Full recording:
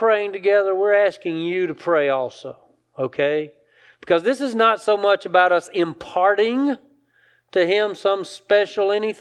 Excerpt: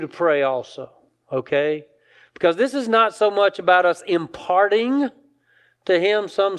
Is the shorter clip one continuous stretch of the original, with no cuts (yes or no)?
yes